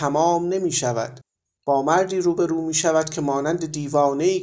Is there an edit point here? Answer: no; 0 cuts

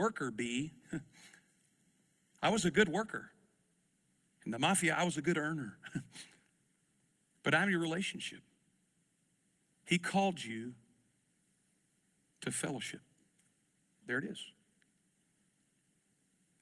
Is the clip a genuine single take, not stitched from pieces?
no; 2 cuts; at 9.6 s, 14.0 s

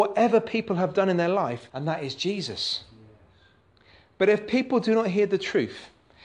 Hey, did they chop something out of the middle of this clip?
yes; 1 cut; at 1.7 s

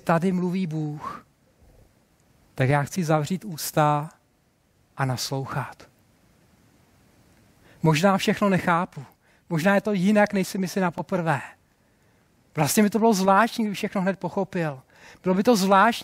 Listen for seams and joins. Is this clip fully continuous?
yes; 0 cuts

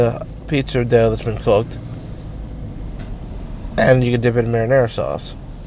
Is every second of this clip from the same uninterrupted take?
yes; 0 cuts

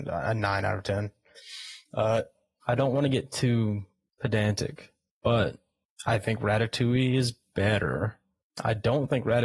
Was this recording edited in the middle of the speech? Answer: yes; 1 cut; at 2.6 s

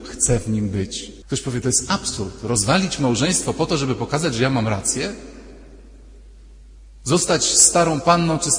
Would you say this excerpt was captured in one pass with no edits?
no; 1 cut; at 1.2 s

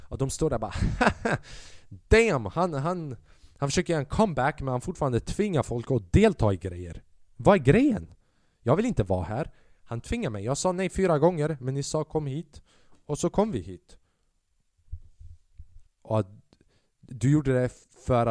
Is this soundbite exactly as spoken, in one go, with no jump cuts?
no; 1 cut; at 15.9 s

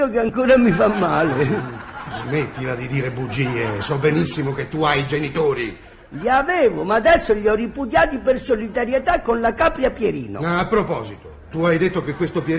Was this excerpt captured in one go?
yes; 0 cuts

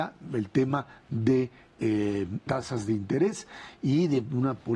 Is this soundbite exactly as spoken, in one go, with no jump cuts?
no; 1 cut; at 2.4 s

